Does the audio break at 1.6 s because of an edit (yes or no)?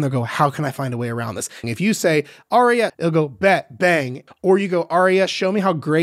yes